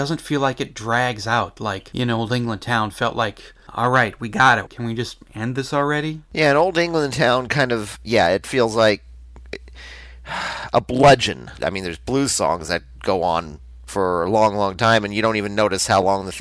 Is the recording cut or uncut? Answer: cut